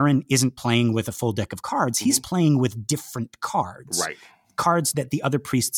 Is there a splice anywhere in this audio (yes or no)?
no